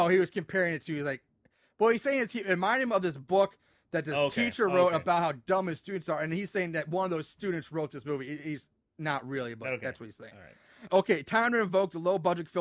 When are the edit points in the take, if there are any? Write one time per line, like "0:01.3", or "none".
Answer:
0:10.9